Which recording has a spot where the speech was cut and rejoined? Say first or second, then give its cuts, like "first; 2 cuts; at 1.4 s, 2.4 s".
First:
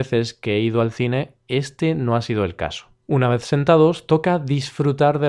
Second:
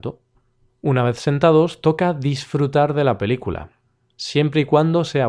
first; 1 cut; at 3.0 s